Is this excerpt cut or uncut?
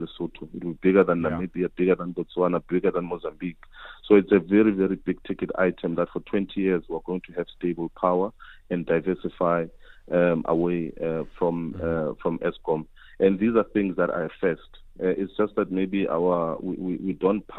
uncut